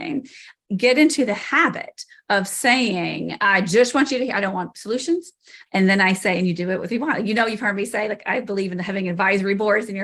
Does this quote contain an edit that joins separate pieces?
yes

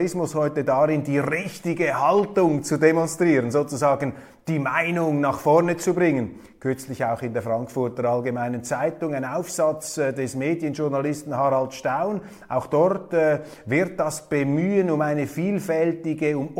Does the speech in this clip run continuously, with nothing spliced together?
yes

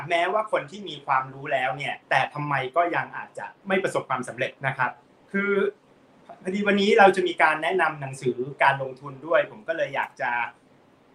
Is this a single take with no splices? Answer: no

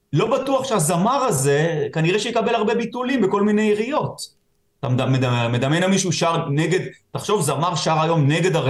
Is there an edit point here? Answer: no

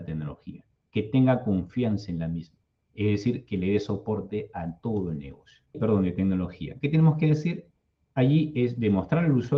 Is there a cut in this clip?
yes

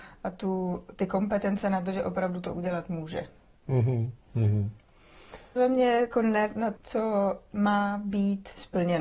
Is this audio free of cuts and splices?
no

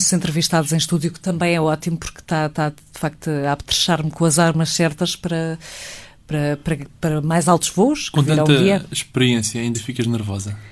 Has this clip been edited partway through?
no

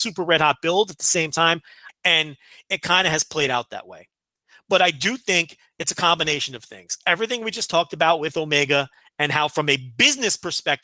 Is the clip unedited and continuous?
no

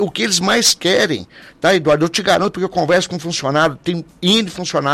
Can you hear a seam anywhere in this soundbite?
no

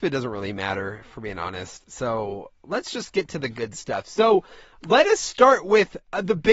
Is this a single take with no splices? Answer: yes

